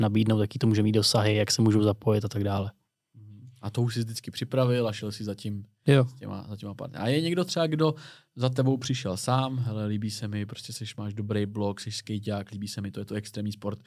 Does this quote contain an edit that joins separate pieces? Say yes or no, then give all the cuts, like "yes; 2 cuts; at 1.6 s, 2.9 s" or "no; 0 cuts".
no; 0 cuts